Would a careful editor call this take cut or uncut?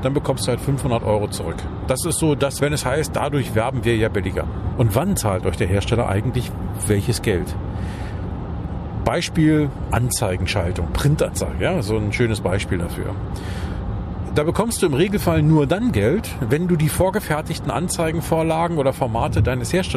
cut